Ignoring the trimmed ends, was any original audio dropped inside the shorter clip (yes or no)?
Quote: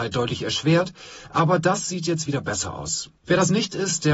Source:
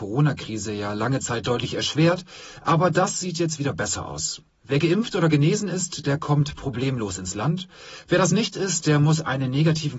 yes